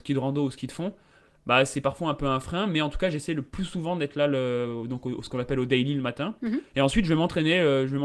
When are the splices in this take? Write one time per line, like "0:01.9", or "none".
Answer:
none